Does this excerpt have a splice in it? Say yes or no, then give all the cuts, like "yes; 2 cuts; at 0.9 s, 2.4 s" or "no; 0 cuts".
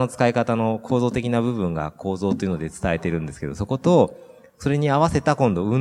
no; 0 cuts